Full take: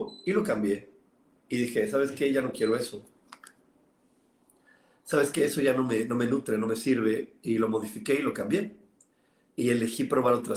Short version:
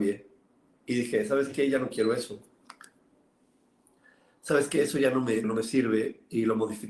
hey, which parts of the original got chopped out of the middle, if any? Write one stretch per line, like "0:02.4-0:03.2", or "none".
0:06.1-0:06.6